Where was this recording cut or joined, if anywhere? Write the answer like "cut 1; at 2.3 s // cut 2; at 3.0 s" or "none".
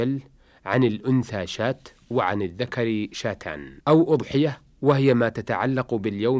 cut 1; at 3.8 s